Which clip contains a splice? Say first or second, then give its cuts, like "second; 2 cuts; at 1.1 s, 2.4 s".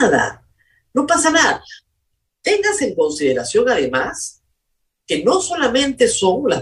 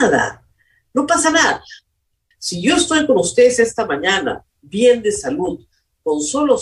second; 1 cut; at 2.3 s